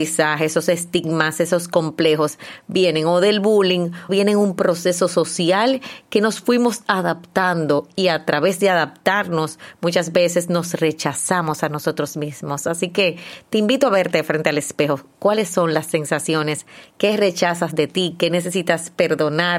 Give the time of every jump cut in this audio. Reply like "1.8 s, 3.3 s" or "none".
4.1 s

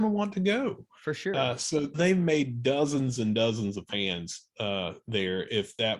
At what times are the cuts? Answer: 1.9 s

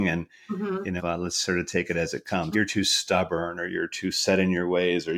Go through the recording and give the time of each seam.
1.0 s, 2.5 s

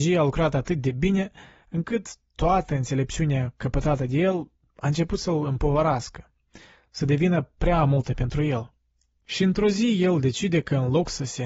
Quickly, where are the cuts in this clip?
none

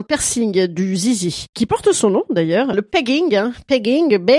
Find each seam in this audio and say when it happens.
2.7 s

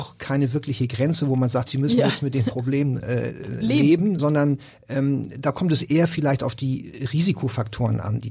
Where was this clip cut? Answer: 1.7 s, 4.2 s

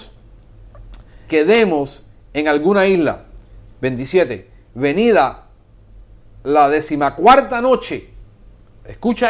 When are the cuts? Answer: 1.3 s

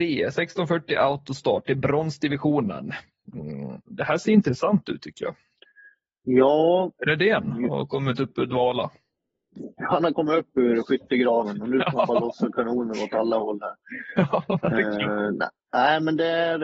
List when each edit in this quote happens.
none

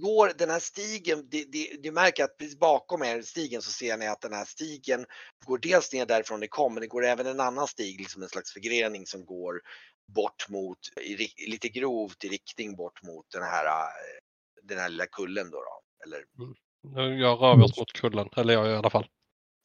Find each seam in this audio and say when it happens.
11.0 s

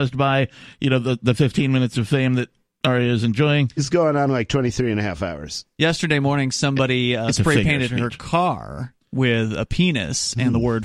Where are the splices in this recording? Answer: 3.8 s

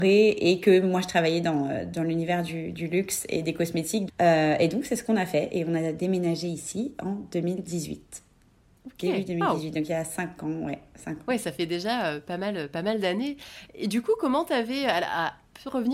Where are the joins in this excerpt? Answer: 4.1 s

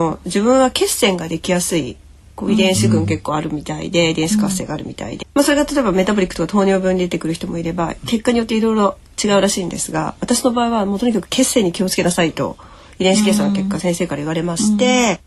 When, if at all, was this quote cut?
5.2 s

